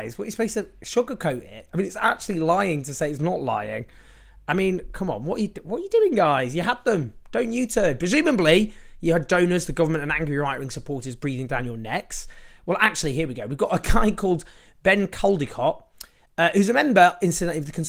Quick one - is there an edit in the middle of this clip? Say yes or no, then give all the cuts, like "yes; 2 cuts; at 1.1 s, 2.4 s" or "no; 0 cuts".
no; 0 cuts